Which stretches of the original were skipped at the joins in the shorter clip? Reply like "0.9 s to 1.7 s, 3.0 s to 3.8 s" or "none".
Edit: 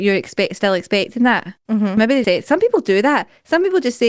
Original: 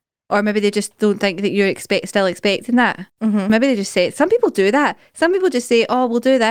3.8 s to 3.9 s